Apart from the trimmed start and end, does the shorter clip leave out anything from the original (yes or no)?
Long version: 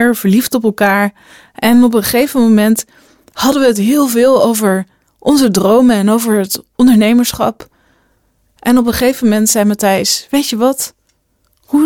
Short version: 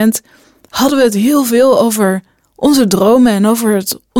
no